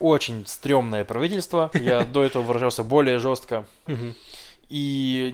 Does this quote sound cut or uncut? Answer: cut